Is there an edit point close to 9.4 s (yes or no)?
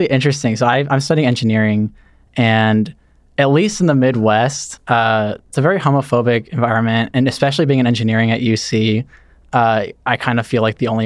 no